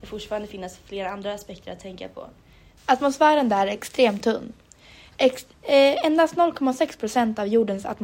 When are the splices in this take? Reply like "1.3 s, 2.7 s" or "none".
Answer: 2.8 s